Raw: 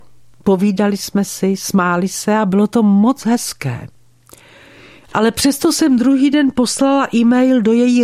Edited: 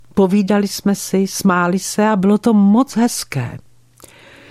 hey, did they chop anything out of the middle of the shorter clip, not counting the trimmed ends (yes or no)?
no